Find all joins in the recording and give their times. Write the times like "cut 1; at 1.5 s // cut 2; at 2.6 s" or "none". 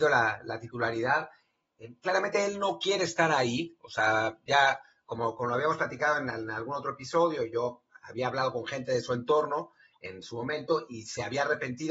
none